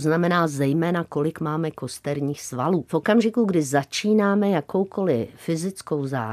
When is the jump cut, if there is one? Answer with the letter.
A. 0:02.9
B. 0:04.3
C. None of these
A